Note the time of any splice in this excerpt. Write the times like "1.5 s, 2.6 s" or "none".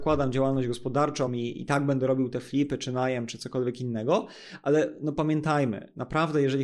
none

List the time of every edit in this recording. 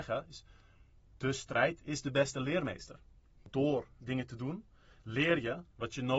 none

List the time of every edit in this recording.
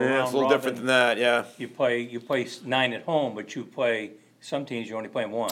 none

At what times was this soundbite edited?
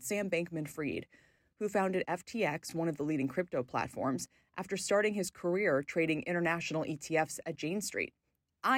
none

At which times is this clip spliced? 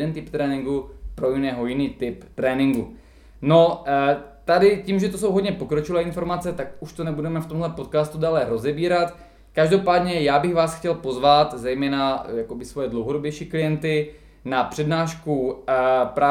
none

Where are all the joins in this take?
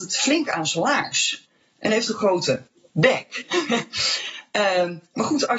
none

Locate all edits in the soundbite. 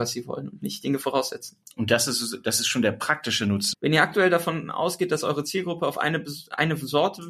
3.7 s

